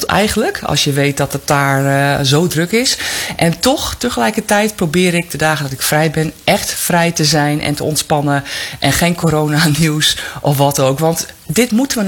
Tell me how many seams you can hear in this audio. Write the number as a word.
zero